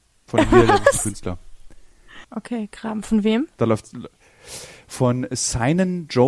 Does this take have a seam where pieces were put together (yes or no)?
yes